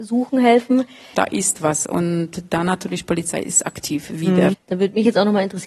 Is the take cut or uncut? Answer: cut